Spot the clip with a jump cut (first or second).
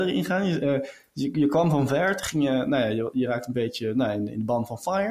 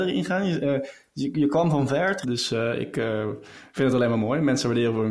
second